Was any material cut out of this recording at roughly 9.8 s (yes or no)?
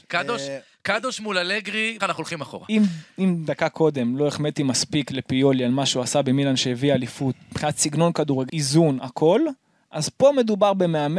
no